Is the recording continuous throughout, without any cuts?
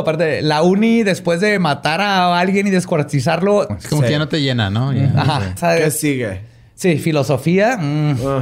no; 2 cuts; at 3.7 s, 5.6 s

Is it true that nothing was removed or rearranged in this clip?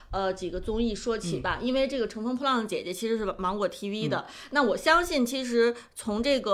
yes; 0 cuts

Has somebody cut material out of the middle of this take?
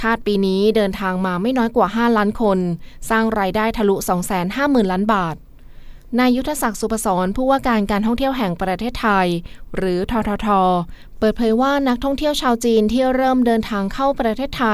no; 0 cuts

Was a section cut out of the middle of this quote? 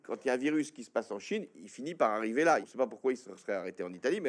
yes; 1 cut; at 2.6 s

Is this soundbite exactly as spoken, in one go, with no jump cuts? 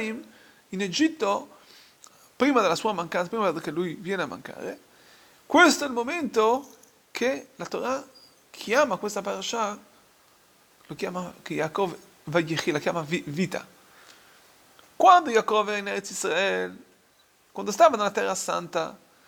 yes; 0 cuts

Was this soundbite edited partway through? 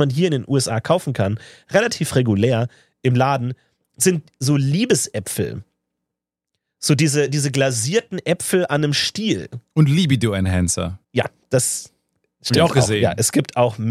yes; 1 cut; at 11.0 s

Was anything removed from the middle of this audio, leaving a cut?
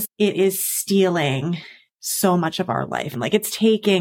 yes; 1 cut; at 3.1 s

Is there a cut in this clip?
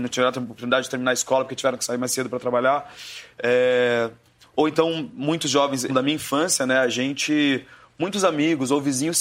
yes; 1 cut; at 5.9 s

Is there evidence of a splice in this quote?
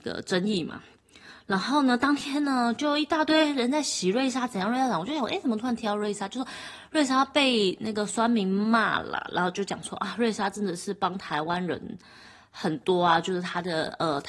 no; 0 cuts

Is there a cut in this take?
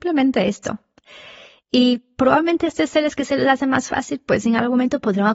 no; 0 cuts

